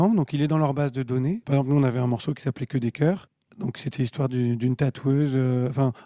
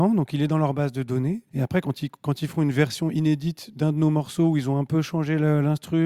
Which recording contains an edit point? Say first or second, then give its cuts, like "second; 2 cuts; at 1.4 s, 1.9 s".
first; 1 cut; at 1.4 s